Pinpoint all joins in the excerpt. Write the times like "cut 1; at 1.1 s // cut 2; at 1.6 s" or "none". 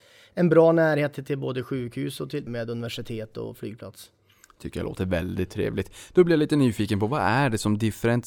cut 1; at 2.5 s